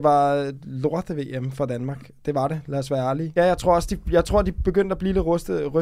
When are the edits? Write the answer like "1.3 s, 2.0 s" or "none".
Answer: 3.4 s